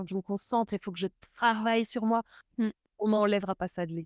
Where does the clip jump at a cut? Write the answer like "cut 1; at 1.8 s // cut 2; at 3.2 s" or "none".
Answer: cut 1; at 2.4 s